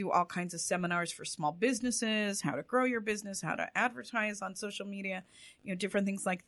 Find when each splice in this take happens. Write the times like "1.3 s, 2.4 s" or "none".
none